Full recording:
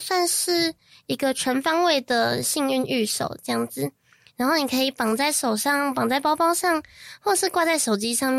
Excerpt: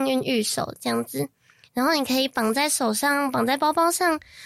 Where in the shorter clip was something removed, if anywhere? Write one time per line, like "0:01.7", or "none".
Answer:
none